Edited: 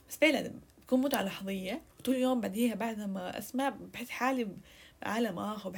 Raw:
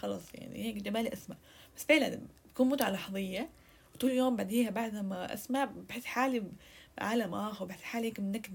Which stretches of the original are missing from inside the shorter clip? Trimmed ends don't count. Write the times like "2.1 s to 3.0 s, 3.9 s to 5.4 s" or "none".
3.6 s to 3.9 s

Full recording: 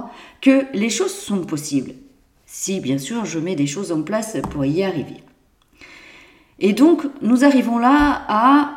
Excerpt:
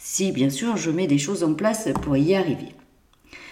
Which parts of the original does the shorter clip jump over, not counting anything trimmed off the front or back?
none

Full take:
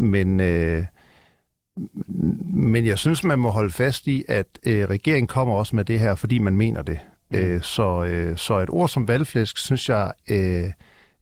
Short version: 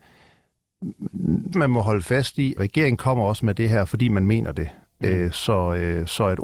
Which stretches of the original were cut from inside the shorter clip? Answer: 2.5 s to 3.2 s, 4.3 s to 4.9 s

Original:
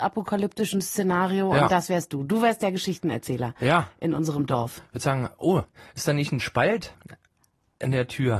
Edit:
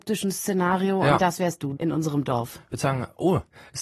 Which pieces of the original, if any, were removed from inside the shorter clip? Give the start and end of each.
2.3 s to 4.0 s

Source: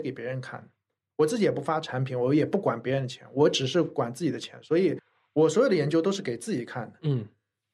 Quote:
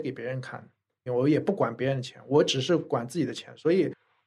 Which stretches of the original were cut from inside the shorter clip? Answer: 1.1 s to 2.1 s

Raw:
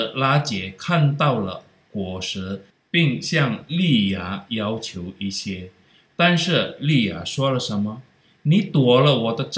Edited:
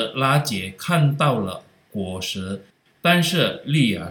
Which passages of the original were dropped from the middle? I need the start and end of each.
2.9 s to 6.0 s

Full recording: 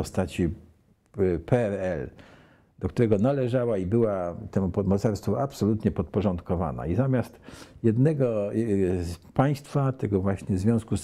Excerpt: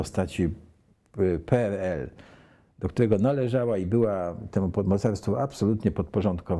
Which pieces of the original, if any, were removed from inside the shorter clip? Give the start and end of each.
none

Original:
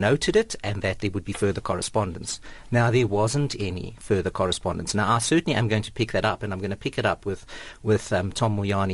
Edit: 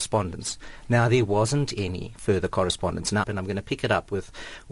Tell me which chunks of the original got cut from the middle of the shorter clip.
5.1 s to 6.4 s

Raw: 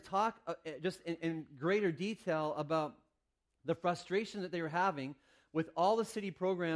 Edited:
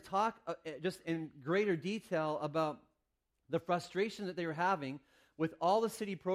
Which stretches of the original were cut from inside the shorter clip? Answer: 1.0 s to 1.2 s

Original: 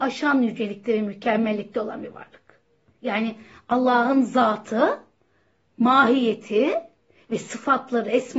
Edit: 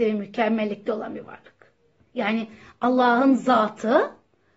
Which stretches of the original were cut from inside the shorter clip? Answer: none

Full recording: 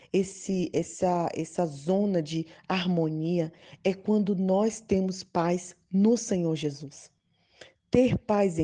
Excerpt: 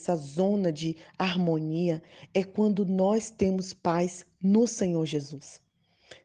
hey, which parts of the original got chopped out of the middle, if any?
none

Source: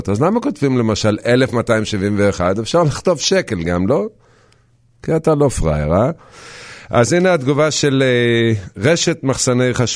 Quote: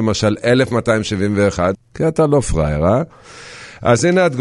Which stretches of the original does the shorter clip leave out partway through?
2.5 s to 4.8 s

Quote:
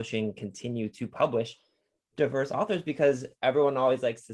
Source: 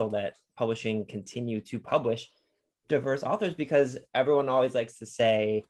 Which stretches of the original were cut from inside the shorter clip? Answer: none

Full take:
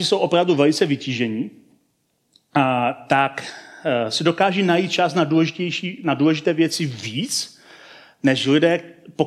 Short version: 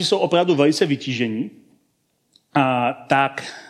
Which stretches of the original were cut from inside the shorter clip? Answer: none

